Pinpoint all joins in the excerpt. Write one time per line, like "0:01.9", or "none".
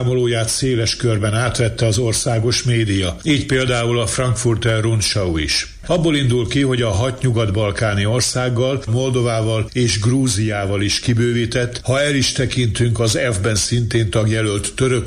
0:05.8
0:08.9
0:11.8